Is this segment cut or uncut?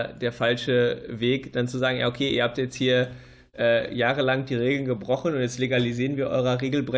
uncut